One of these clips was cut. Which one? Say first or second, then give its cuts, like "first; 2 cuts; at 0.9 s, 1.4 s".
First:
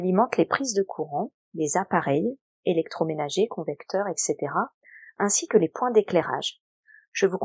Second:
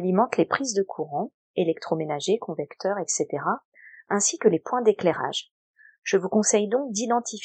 second; 1 cut; at 1.4 s